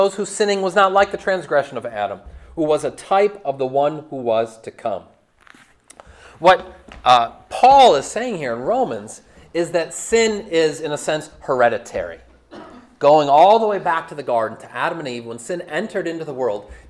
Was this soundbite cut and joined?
no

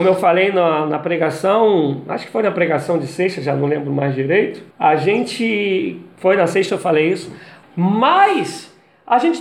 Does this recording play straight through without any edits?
no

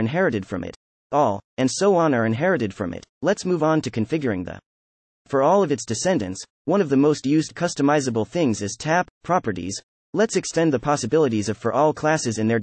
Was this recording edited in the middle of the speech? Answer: yes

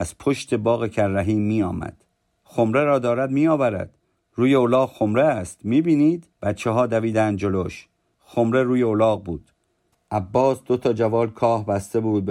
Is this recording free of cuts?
no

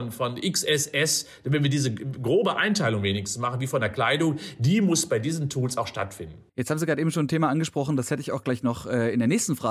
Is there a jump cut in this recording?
yes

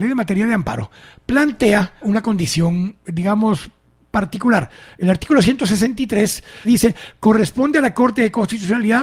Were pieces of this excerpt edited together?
yes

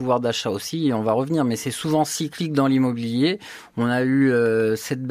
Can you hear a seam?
no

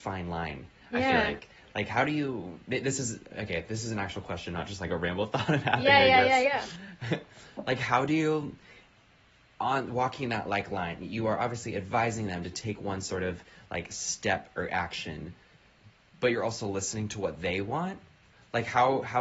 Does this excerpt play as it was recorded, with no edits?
yes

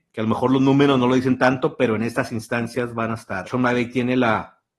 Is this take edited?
yes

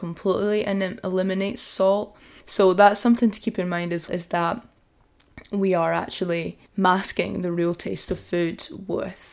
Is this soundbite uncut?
no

